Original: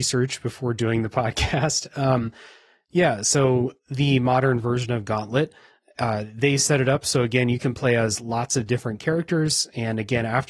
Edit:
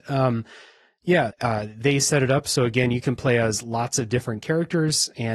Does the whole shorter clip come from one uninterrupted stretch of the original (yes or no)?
no